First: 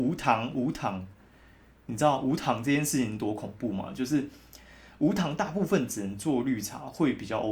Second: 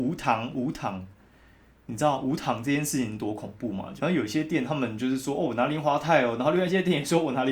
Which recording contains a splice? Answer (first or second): second